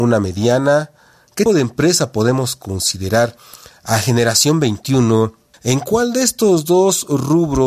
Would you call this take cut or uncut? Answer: cut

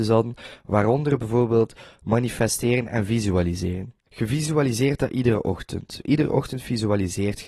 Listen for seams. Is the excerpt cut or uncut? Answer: cut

